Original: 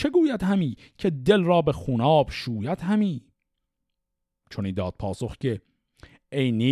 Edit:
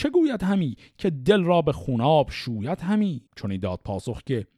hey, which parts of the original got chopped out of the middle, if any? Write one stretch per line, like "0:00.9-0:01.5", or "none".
0:03.3-0:04.4